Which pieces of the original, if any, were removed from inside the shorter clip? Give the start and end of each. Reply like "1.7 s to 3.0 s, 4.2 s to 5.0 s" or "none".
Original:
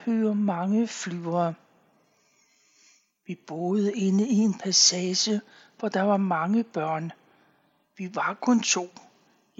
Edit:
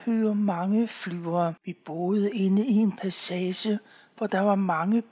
1.6 s to 3.2 s